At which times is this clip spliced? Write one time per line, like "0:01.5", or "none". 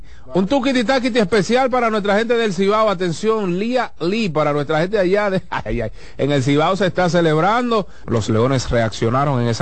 0:05.7
0:08.0